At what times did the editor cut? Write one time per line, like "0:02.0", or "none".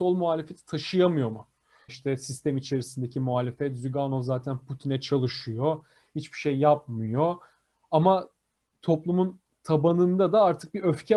0:01.9